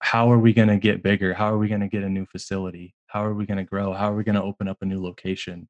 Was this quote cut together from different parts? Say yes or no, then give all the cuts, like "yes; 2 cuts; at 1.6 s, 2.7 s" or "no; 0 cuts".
no; 0 cuts